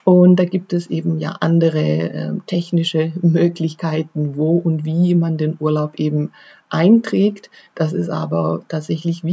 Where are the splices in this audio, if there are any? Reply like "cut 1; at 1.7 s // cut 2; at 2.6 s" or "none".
none